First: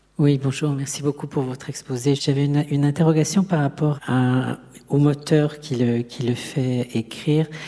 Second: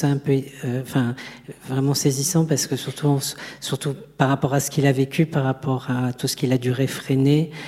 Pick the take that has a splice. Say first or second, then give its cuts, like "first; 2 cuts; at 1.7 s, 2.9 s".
first; 2 cuts; at 2.2 s, 4.0 s